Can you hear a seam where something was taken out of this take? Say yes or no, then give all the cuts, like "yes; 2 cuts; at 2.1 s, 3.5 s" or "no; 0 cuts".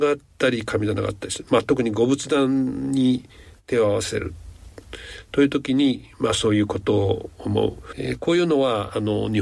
no; 0 cuts